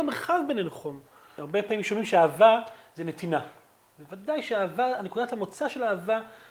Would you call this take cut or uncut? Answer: uncut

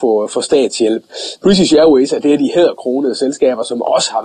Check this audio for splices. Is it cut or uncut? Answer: uncut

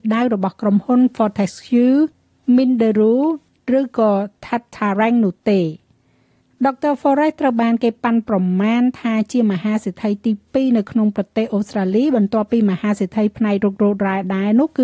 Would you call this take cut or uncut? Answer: uncut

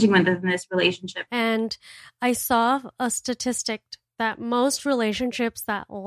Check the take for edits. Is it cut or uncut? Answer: cut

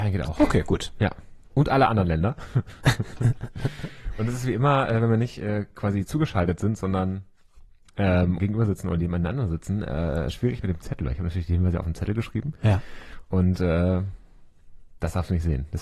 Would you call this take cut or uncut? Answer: cut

